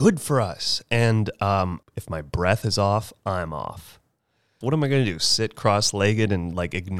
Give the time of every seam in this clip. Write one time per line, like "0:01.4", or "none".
0:01.8
0:04.6